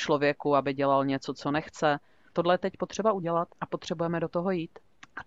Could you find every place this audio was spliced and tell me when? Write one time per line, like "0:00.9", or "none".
0:02.3
0:03.5